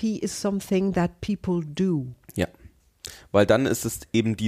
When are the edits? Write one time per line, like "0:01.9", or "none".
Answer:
none